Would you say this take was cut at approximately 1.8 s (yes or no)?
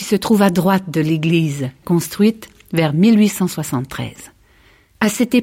yes